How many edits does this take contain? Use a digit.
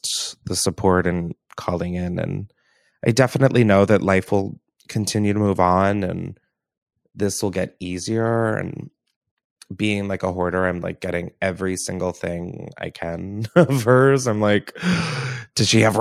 0